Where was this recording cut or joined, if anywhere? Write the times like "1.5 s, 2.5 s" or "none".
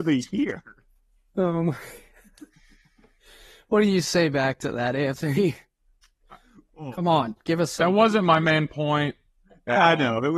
none

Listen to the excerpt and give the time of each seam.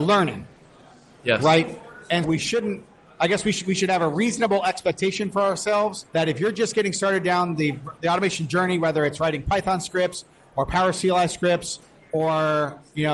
2.2 s, 6.1 s

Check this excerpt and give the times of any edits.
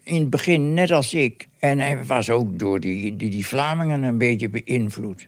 1.4 s

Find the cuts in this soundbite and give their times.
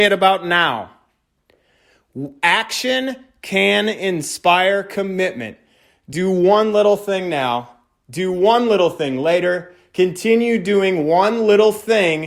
none

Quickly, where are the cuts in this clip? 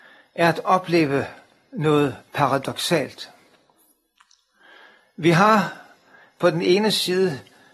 2.3 s

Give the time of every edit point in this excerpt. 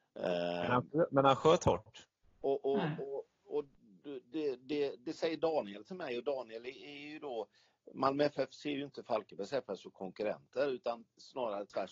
2.2 s

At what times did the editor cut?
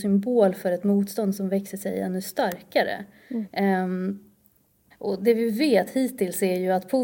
4.9 s

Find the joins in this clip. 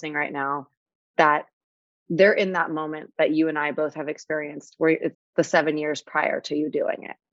5.1 s

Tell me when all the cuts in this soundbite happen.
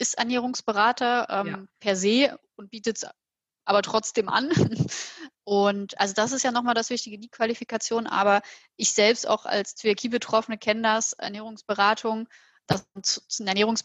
5.3 s, 12.7 s

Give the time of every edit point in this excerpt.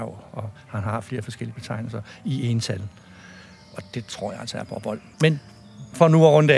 5.1 s

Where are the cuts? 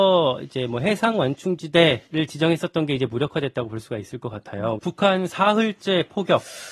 2.1 s, 4.8 s

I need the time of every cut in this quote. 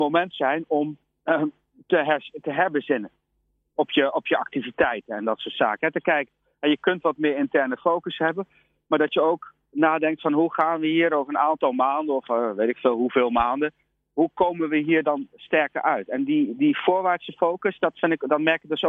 none

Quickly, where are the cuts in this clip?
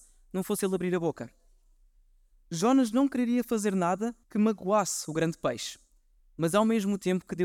4.2 s, 6.2 s

